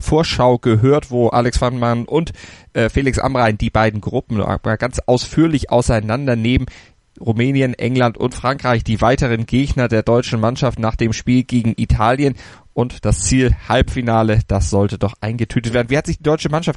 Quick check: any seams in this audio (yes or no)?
no